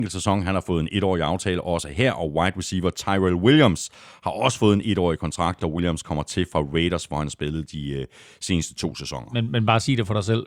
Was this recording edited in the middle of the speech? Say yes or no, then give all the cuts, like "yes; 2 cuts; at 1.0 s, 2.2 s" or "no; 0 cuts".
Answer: no; 0 cuts